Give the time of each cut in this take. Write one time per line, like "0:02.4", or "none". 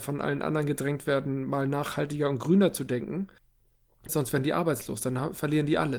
0:04.1